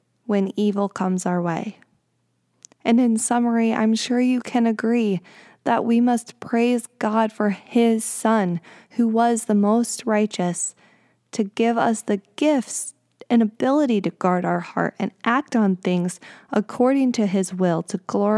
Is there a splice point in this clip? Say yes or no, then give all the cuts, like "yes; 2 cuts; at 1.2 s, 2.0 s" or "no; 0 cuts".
no; 0 cuts